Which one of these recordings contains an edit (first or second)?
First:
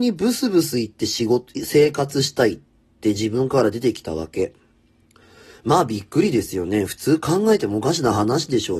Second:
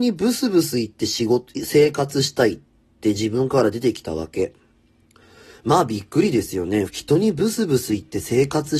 second